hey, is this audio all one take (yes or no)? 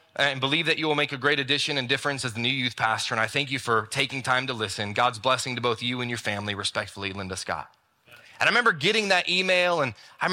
yes